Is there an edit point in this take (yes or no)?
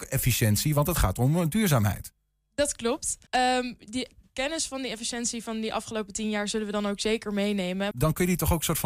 yes